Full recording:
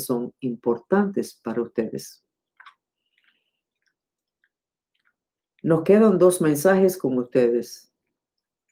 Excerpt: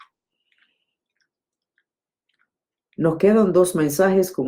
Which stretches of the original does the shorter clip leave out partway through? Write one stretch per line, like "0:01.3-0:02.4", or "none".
none